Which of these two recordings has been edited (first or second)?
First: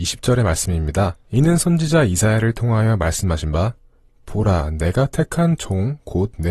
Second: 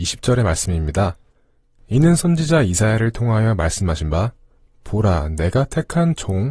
first